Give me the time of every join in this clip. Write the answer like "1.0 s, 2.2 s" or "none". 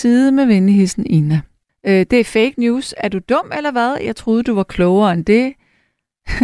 1.7 s